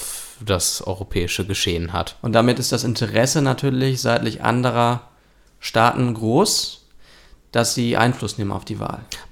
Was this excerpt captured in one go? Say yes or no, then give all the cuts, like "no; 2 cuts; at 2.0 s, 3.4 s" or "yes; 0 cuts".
yes; 0 cuts